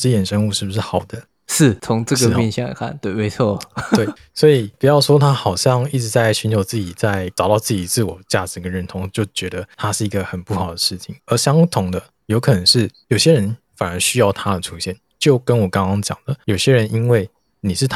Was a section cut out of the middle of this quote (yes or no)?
no